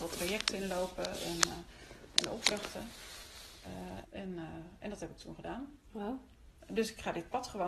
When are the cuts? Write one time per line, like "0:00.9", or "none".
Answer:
0:04.0
0:06.6

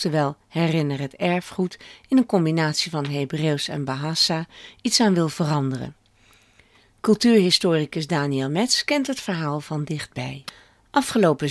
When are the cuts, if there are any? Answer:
none

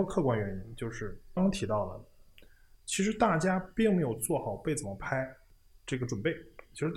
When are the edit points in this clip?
0:01.4

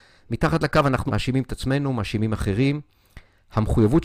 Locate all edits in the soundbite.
0:01.1

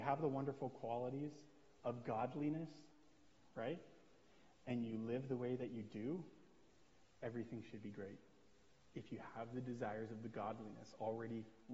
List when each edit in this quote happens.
none

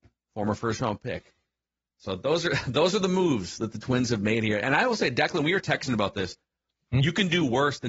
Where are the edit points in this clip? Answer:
0:06.9

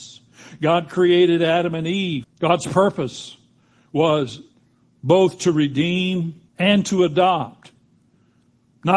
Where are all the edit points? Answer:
0:02.2
0:06.5

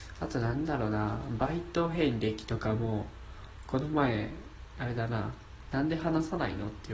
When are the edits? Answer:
0:05.7

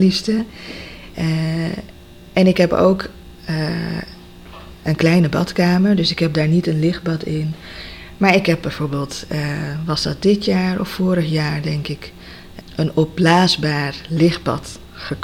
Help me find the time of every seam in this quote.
0:01.1
0:12.6

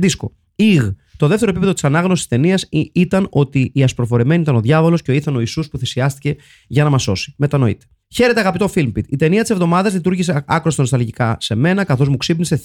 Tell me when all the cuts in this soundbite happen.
0:08.0

